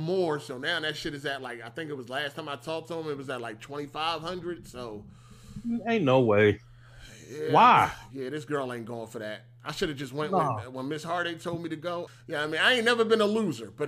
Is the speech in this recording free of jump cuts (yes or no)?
no